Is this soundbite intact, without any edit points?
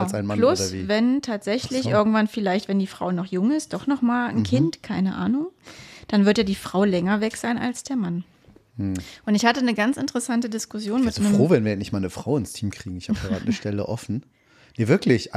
yes; 0 cuts

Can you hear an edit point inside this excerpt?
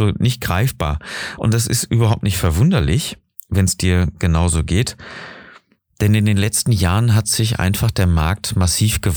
no; 0 cuts

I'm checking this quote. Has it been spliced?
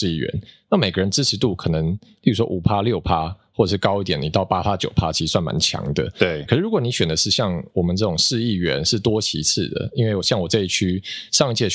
yes; 1 cut; at 6.5 s

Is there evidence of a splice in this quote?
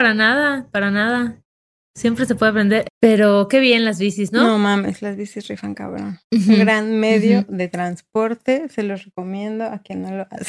yes; 1 cut; at 2.9 s

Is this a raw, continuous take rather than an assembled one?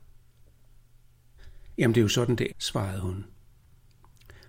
no; 1 cut; at 2.5 s

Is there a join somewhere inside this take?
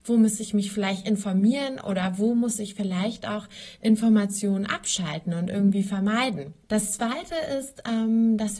yes; 1 cut; at 6.6 s

